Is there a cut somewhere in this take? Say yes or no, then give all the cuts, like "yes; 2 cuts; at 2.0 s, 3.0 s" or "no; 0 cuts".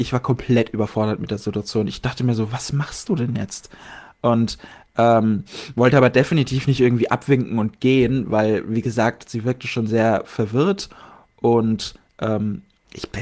no; 0 cuts